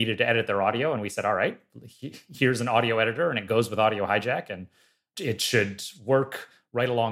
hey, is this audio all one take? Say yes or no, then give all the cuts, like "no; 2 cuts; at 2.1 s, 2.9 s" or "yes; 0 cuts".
yes; 0 cuts